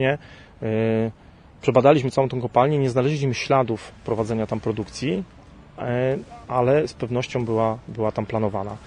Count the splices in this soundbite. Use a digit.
0